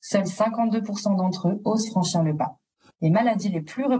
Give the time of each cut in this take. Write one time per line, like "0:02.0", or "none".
0:02.9